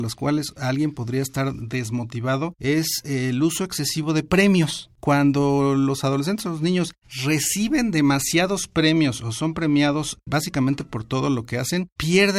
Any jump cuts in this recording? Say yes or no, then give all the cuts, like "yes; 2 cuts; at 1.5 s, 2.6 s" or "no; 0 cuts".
no; 0 cuts